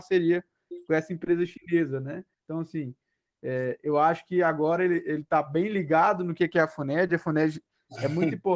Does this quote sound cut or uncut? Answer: cut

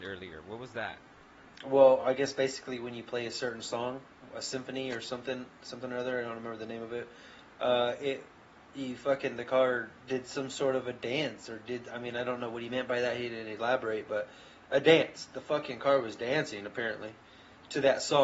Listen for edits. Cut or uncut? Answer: uncut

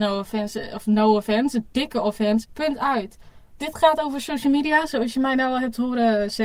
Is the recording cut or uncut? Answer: cut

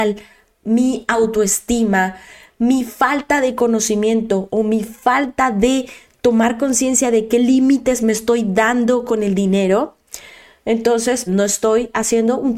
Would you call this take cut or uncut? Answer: cut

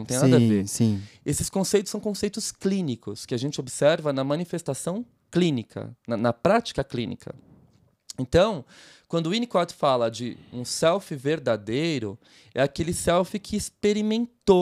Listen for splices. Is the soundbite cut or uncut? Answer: uncut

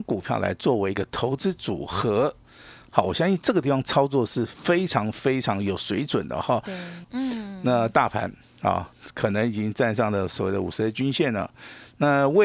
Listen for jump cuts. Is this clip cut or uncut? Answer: cut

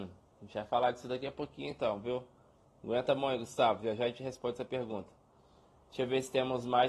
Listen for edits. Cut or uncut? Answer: uncut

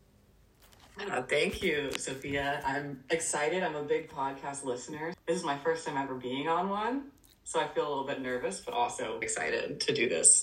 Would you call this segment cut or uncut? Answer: cut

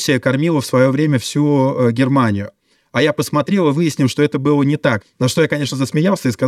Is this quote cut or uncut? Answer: cut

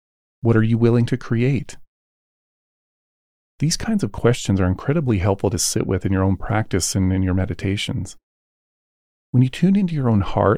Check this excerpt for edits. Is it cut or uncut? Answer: uncut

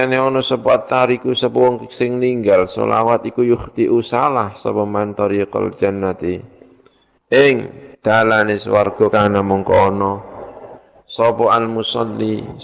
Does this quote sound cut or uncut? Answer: cut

